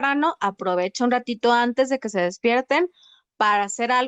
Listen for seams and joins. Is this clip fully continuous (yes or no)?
yes